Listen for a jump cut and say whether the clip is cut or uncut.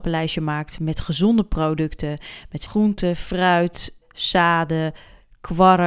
cut